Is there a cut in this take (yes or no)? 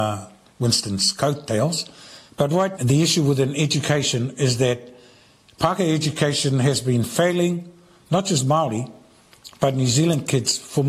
yes